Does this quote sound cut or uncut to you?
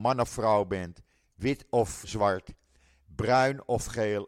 cut